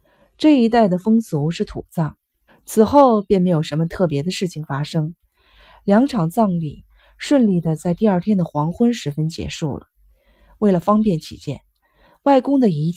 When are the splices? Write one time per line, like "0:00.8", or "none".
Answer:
0:02.5